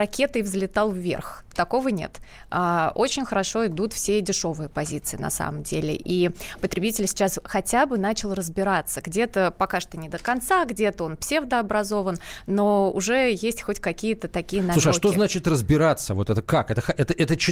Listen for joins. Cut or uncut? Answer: uncut